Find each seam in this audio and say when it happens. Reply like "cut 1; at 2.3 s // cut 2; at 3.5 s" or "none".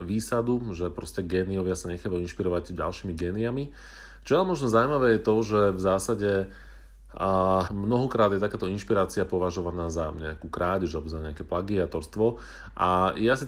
cut 1; at 7.7 s